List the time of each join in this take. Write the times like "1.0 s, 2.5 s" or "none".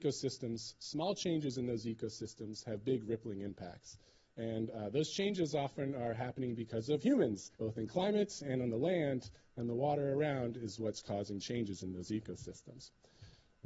7.5 s